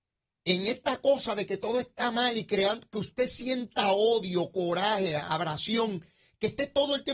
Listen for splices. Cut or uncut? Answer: uncut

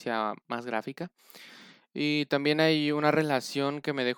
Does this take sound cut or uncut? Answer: uncut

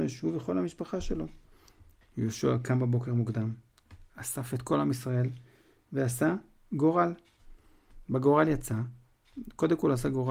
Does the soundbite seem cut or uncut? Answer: uncut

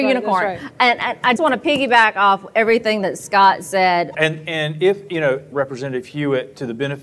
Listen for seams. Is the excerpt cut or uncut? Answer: cut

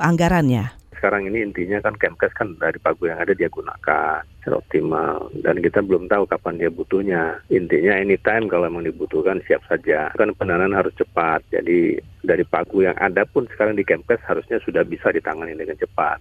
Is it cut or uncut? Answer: uncut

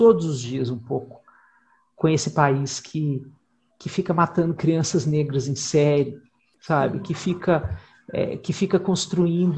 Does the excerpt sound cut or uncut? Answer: uncut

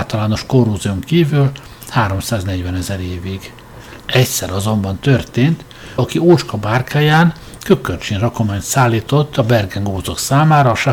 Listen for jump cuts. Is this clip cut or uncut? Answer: cut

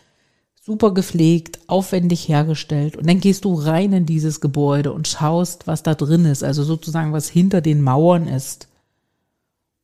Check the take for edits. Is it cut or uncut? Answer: uncut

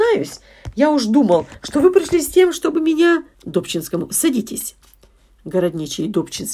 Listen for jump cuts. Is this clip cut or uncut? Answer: cut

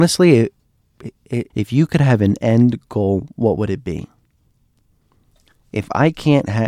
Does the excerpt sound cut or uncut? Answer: cut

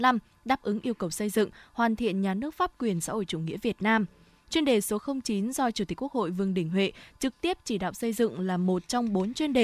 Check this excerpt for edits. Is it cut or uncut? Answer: uncut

